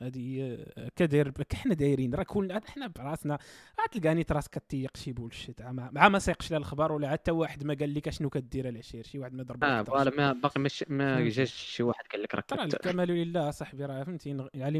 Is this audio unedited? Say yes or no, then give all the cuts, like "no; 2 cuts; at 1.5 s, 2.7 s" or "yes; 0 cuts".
yes; 0 cuts